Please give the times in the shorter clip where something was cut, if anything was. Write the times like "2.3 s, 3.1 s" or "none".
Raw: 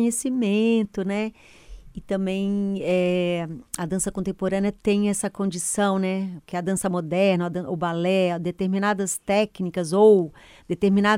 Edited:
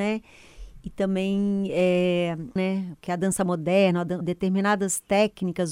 2.6 s, 4.2 s